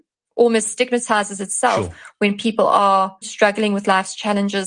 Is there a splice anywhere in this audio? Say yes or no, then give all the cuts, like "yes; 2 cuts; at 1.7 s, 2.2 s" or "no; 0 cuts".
yes; 1 cut; at 3.2 s